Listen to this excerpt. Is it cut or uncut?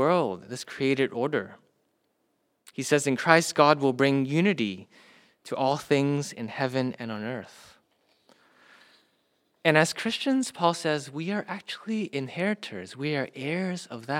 uncut